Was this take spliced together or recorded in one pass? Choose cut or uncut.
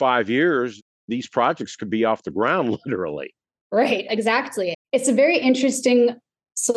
cut